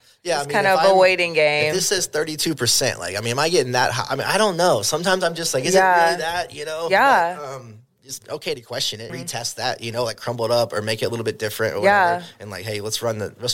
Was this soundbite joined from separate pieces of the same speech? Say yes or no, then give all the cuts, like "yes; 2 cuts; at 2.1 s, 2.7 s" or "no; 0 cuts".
yes; 1 cut; at 9.1 s